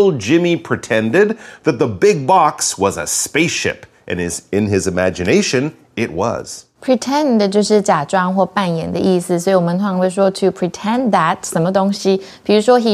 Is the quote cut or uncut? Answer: cut